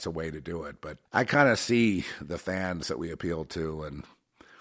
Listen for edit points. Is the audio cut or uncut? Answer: cut